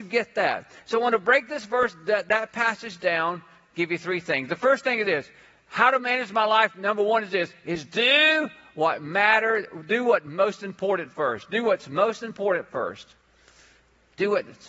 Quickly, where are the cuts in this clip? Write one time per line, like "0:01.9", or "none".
none